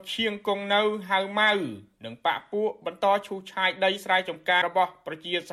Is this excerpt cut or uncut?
cut